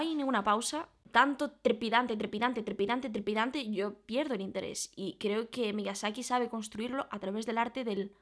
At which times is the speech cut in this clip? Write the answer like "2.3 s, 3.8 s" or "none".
none

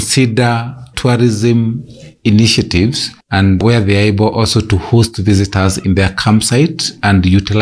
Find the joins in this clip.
3.2 s

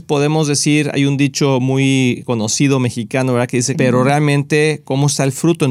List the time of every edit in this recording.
3.7 s

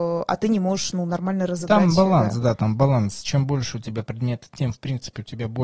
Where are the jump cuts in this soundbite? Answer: none

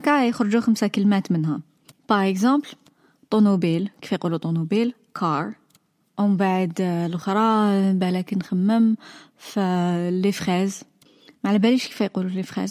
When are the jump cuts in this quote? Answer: none

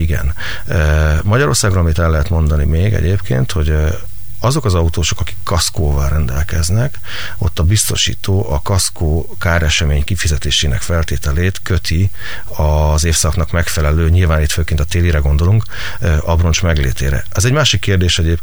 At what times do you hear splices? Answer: none

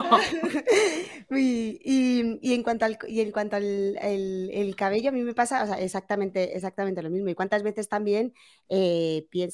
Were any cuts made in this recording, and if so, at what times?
none

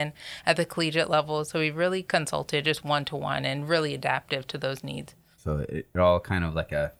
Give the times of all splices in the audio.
5.4 s

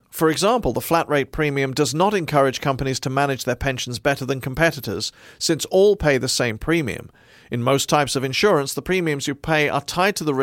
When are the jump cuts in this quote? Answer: none

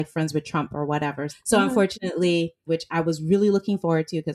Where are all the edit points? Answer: 1.3 s, 2.7 s

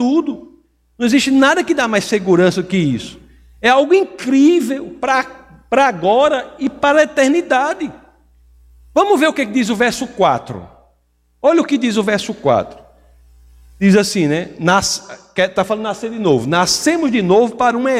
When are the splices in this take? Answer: none

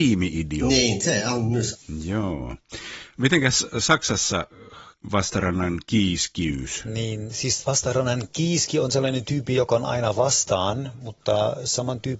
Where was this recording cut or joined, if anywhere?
none

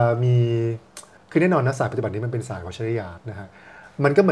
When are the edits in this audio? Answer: 3.2 s

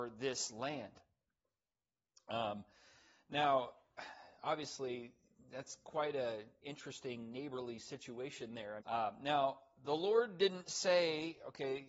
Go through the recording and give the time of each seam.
8.8 s

